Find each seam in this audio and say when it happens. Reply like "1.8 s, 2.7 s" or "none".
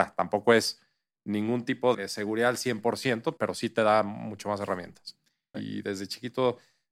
1.9 s, 3.4 s, 5.5 s